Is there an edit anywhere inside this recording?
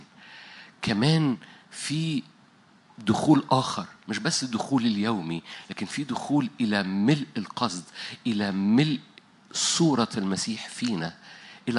no; 0 cuts

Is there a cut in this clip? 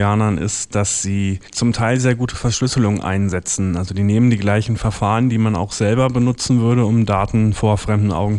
no; 0 cuts

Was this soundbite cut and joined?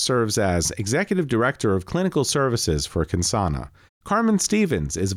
yes; 1 cut; at 3.9 s

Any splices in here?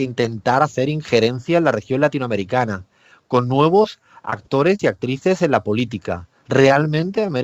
no; 0 cuts

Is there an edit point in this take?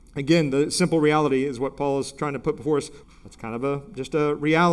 yes; 1 cut; at 3.0 s

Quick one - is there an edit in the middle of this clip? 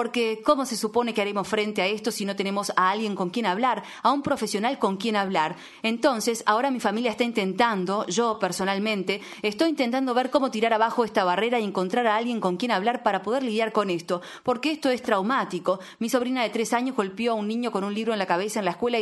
no; 0 cuts

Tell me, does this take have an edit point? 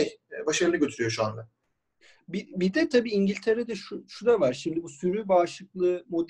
no; 0 cuts

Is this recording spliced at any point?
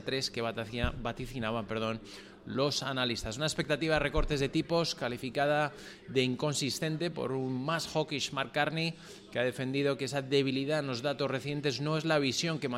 no; 0 cuts

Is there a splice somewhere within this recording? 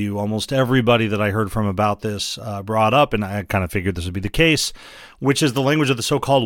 no; 0 cuts

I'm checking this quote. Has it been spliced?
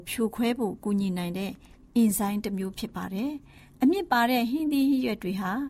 no; 0 cuts

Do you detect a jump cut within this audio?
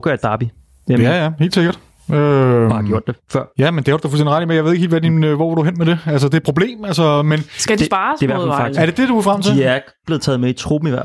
no; 0 cuts

